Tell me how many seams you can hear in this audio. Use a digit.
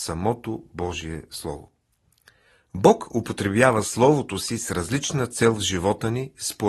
0